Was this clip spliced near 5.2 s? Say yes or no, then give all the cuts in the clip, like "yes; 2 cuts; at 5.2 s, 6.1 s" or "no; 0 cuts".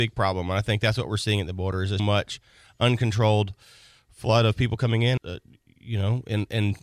yes; 2 cuts; at 2.0 s, 5.2 s